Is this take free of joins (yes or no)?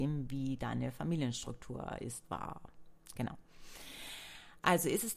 yes